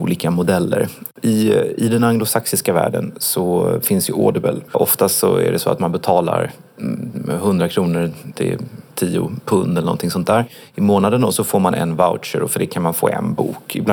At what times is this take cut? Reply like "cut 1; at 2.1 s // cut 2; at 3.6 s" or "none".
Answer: cut 1; at 4.7 s